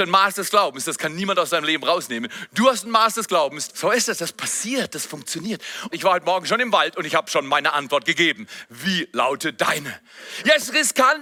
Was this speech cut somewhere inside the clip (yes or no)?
yes